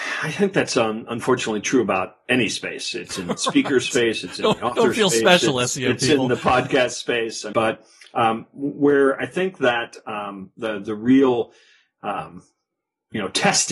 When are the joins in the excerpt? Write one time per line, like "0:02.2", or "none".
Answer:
0:07.5